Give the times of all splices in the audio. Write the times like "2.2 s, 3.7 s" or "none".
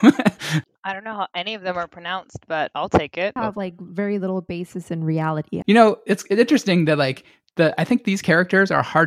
3.4 s, 5.6 s